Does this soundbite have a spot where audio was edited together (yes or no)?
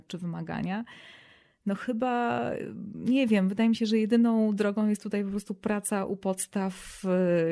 no